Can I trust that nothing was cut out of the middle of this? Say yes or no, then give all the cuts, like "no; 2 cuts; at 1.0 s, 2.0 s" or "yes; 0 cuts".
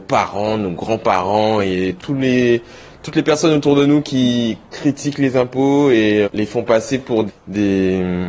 no; 3 cuts; at 2.0 s, 6.2 s, 7.3 s